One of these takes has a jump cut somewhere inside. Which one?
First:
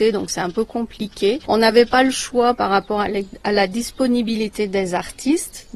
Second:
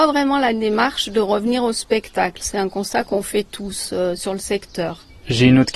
second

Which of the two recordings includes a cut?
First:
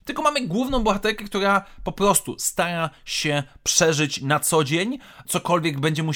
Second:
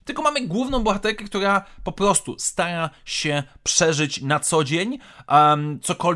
first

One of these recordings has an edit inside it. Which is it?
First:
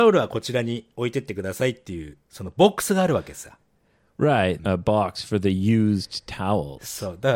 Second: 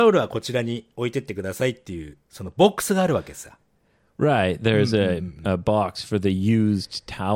first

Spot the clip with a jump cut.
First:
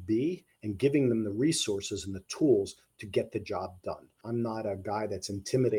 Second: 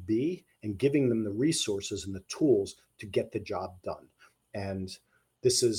first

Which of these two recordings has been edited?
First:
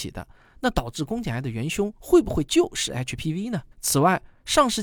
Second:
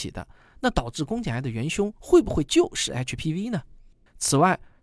first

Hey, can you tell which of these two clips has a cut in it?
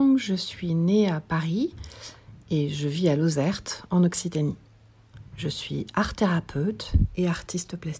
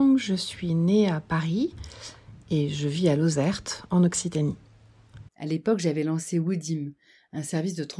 second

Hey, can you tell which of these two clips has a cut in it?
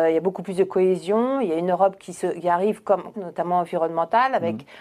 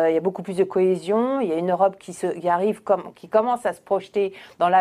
first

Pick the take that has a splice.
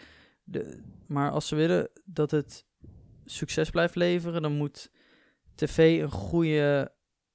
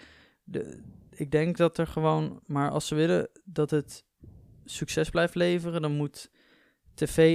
first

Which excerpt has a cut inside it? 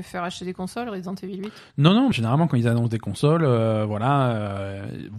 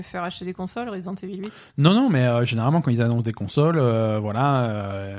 first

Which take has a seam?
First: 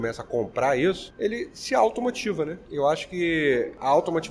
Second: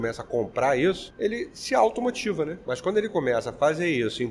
second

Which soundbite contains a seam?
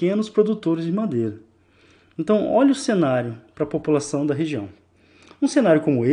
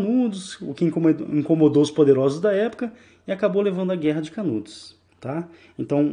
second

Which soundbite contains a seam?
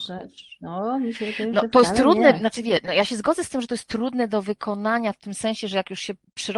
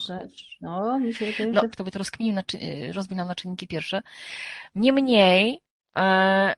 second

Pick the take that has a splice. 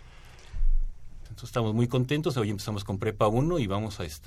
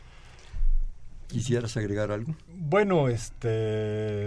first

